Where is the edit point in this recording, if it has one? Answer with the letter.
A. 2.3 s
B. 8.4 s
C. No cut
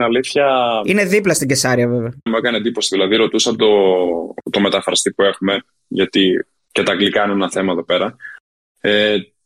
A